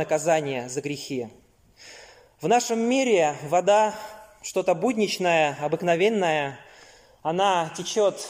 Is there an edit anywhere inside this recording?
no; 0 cuts

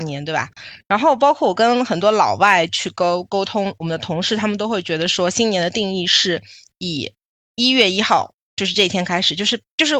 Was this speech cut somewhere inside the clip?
no; 0 cuts

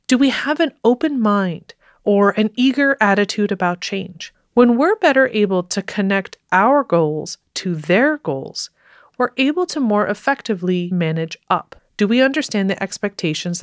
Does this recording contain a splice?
yes; 2 cuts; at 4.3 s, 11.8 s

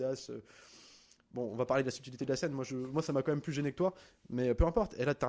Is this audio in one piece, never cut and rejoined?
yes; 0 cuts

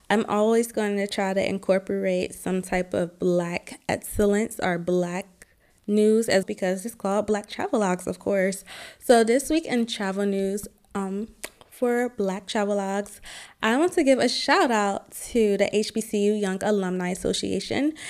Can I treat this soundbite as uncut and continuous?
no; 1 cut; at 6.4 s

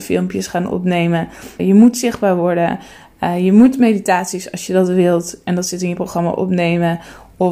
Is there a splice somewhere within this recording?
yes; 1 cut; at 1.6 s

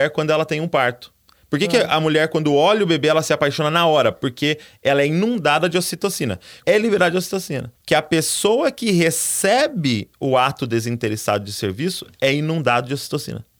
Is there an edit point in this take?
yes; 2 cuts; at 6.6 s, 7.7 s

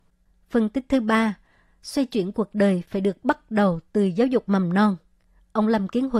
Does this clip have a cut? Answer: no; 0 cuts

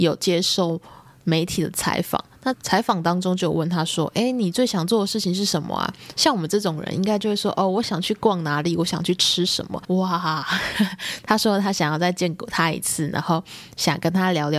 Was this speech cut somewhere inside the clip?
yes; 2 cuts; at 2.5 s, 9.8 s

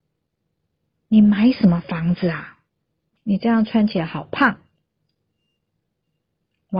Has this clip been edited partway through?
yes; 1 cut; at 3.2 s

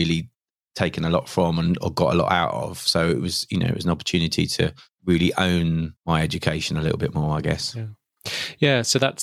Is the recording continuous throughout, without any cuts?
no; 1 cut; at 6.0 s

